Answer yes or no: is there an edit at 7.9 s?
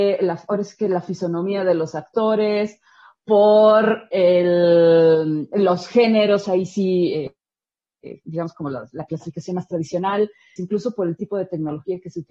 no